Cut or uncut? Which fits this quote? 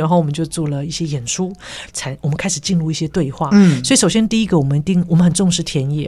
cut